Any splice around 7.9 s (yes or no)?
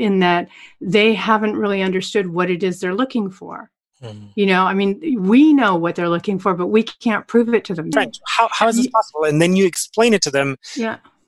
yes